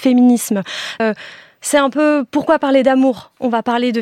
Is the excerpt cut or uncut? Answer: cut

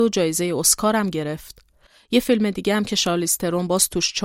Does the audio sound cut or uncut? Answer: uncut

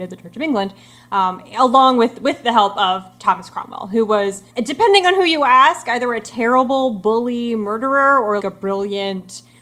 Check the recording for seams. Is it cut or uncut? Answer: cut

